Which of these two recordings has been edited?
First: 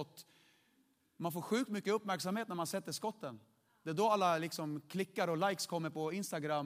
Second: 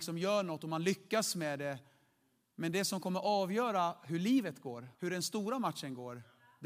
second; 1 cut; at 4.9 s

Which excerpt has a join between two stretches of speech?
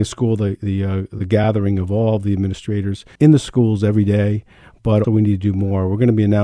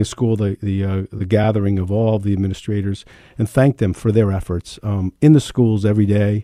first; 2 cuts; at 3.2 s, 5.0 s

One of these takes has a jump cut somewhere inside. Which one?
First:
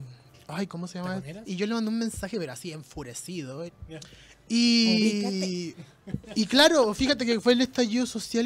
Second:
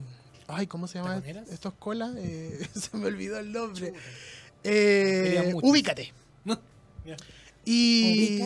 first; 2 cuts; at 1.5 s, 3.7 s

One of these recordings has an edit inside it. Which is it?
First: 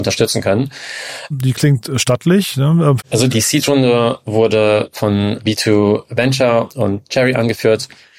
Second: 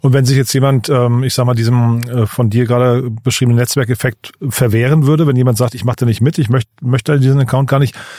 first; 2 cuts; at 1.3 s, 3.0 s

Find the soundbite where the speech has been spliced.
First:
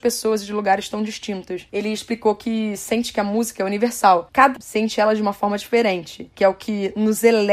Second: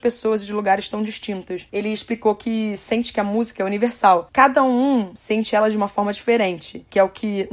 first; 1 cut; at 4.6 s

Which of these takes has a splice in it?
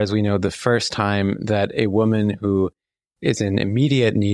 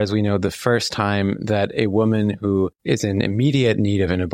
second; 1 cut; at 2.8 s

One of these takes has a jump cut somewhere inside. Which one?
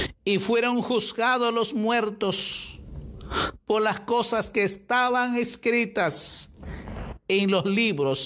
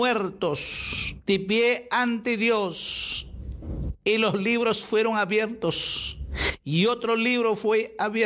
second; 1 cut; at 1.2 s

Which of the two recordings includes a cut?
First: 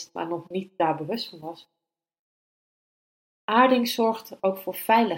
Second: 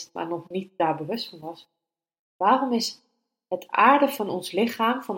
second; 1 cut; at 2.2 s

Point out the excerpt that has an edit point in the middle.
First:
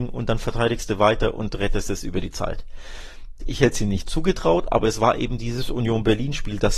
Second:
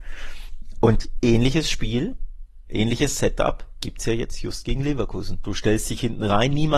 first; 1 cut; at 3.4 s

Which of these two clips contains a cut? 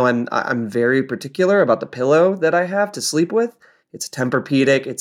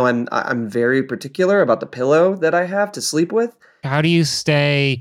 second; 1 cut; at 3.8 s

